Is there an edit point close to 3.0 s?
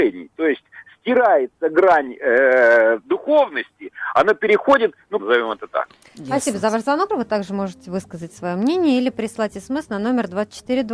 no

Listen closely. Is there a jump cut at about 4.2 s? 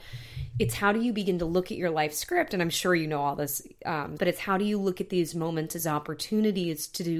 yes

